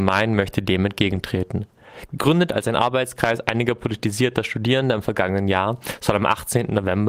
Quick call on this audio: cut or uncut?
uncut